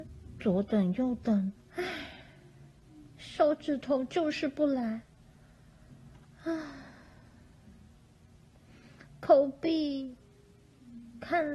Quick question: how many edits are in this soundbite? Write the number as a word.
one